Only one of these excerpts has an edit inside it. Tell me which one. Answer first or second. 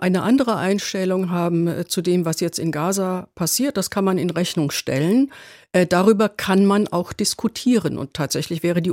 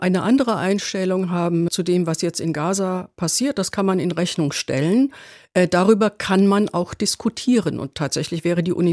second